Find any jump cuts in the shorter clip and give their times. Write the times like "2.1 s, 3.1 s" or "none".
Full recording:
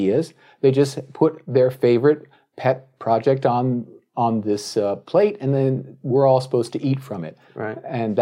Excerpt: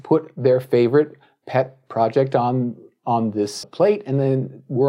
3.6 s